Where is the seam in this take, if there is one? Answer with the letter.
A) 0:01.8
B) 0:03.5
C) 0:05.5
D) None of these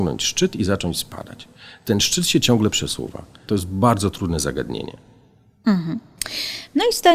B